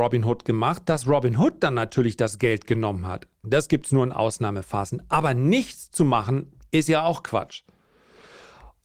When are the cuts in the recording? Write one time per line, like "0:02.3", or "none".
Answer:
0:03.4